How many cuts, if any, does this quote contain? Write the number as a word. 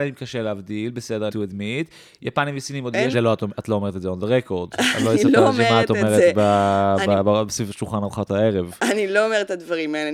two